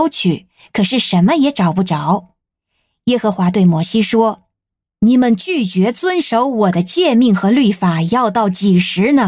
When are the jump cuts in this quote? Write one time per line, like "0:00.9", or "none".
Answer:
none